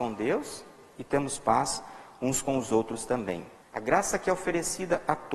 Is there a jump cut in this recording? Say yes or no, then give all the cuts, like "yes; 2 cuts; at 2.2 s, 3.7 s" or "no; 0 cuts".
yes; 1 cut; at 3.6 s